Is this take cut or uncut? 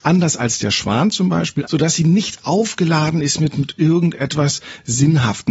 cut